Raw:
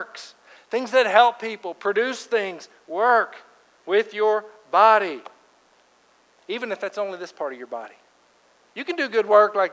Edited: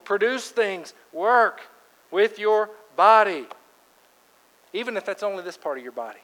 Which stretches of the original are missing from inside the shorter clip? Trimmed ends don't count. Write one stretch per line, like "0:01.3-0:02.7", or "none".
none